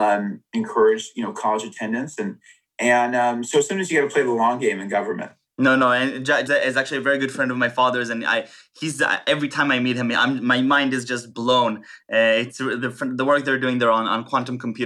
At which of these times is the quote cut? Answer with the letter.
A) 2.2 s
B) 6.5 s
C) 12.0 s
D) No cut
B